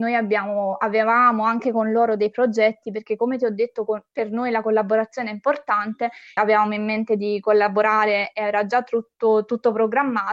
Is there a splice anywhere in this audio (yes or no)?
yes